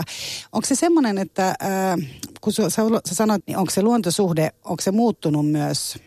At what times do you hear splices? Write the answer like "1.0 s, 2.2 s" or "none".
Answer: 3.4 s